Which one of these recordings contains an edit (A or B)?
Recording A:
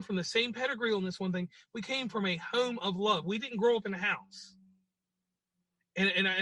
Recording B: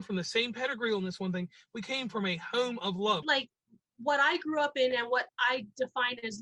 B